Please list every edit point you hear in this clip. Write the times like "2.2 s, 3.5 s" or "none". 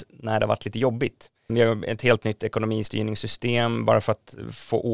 1.5 s